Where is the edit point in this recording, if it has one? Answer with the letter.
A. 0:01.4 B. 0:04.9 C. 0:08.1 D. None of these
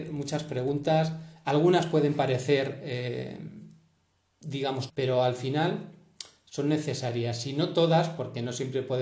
B